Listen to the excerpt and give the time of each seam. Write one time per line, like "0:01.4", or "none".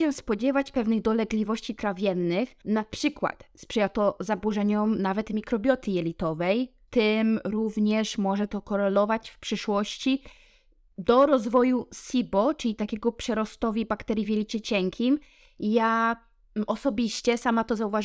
none